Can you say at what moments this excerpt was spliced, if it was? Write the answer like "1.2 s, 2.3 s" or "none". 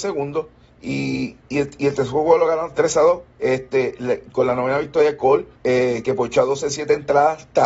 1.4 s, 5.5 s